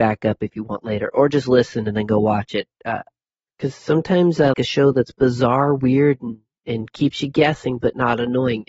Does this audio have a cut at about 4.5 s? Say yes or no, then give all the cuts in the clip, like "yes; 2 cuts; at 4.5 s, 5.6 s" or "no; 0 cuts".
yes; 2 cuts; at 3.5 s, 4.5 s